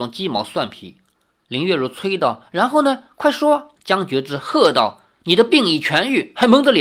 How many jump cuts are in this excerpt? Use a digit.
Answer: 1